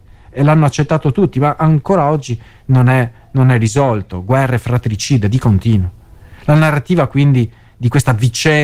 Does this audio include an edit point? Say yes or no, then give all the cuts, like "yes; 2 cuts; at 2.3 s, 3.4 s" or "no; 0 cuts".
no; 0 cuts